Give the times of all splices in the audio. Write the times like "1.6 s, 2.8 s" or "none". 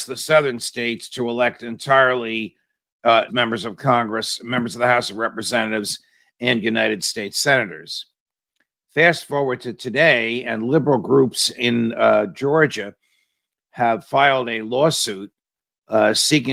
3.3 s